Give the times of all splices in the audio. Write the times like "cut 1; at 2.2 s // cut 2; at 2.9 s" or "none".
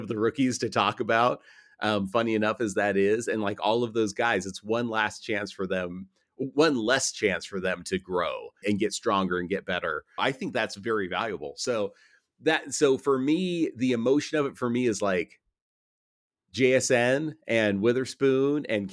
cut 1; at 8.6 s // cut 2; at 10.2 s